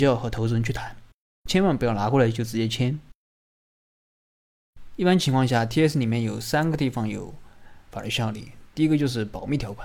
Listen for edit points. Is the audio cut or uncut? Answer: uncut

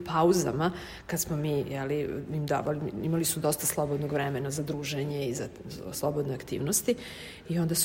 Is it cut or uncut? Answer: uncut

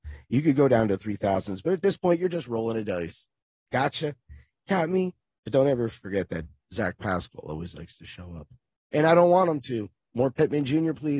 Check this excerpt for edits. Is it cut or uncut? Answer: uncut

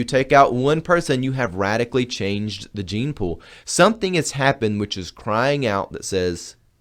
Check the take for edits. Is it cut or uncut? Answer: uncut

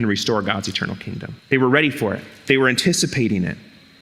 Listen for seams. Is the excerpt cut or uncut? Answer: cut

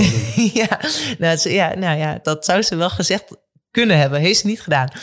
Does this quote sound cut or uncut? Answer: cut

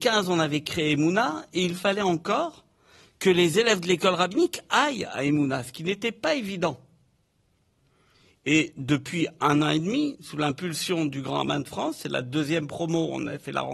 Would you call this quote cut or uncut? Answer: uncut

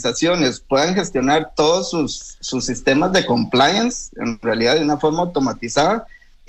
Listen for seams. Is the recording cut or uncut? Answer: uncut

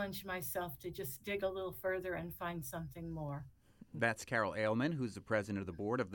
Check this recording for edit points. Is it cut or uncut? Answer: uncut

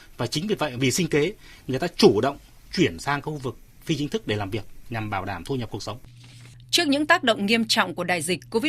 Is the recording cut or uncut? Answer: uncut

